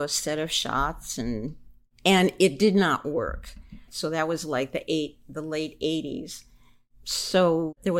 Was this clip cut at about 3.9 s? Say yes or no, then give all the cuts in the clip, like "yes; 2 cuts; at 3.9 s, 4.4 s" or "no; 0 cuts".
yes; 1 cut; at 3.9 s